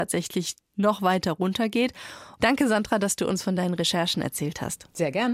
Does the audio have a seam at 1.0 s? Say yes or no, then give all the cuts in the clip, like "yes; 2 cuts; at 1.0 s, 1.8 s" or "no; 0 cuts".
no; 1 cut; at 2.4 s